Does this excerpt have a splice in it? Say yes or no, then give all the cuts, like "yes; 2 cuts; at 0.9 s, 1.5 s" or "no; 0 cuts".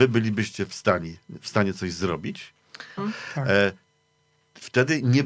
yes; 1 cut; at 3.0 s